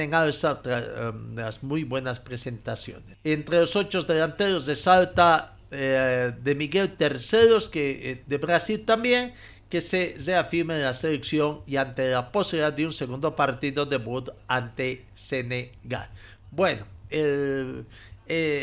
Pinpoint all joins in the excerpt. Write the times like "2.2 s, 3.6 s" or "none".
3.1 s, 17.1 s